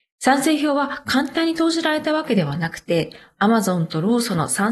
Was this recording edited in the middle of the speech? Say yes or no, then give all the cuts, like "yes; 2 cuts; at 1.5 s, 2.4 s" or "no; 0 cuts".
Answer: no; 0 cuts